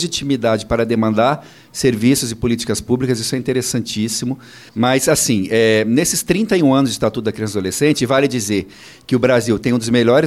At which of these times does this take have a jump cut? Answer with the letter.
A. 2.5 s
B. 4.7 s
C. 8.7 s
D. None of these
B